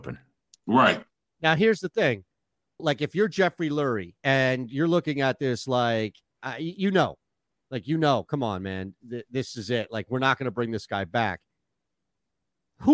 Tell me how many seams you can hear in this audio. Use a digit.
2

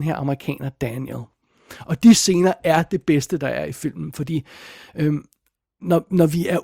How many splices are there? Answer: 0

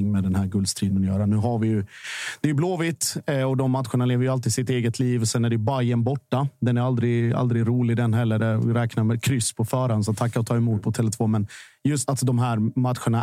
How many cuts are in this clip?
1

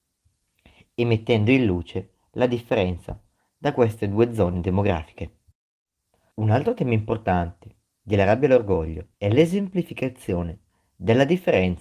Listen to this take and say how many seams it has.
2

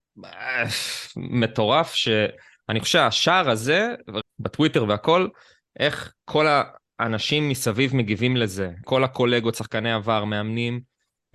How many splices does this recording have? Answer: 2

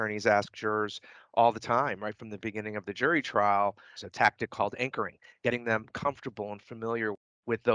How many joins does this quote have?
2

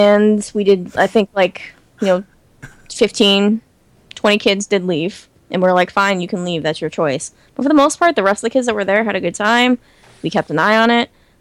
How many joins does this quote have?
0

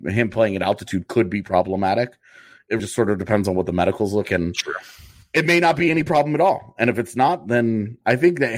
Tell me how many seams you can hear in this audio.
2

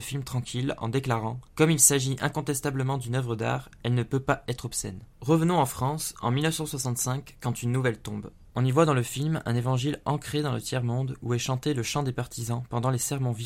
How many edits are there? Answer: 1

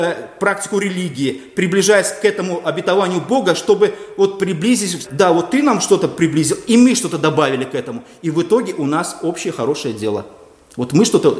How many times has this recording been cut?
1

